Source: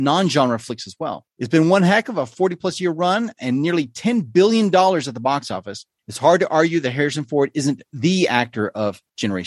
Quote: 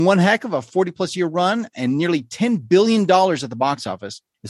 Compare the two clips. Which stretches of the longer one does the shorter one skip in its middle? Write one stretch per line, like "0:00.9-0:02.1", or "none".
none